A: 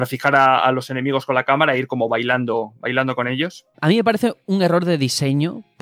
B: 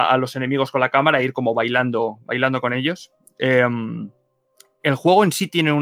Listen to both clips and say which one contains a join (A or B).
A